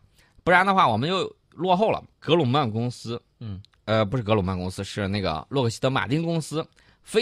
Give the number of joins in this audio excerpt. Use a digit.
1